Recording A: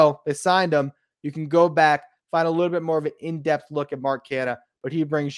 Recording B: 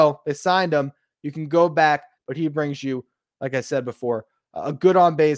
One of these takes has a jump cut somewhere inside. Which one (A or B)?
B